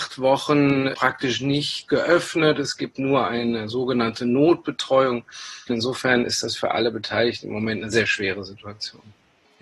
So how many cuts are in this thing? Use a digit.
1